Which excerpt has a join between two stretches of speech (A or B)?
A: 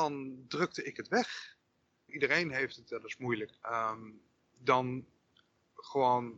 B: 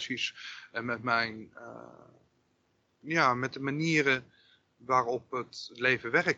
A